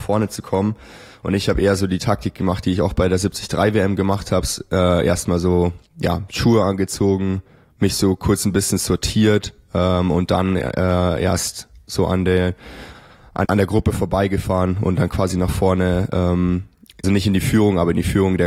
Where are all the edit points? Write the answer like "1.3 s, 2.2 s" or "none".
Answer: 13.4 s, 17.0 s